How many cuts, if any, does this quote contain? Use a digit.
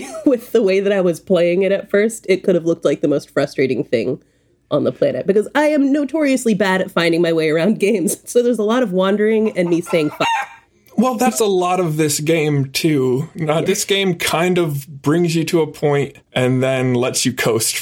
2